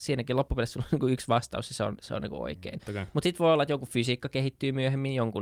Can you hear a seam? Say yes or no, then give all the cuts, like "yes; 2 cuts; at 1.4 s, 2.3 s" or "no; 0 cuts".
yes; 1 cut; at 2.8 s